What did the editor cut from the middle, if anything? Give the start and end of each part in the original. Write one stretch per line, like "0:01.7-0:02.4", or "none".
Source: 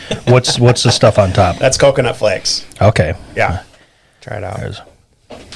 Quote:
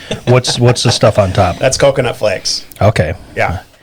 none